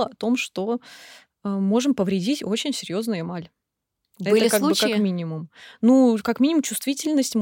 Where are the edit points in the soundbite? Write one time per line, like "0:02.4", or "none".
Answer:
none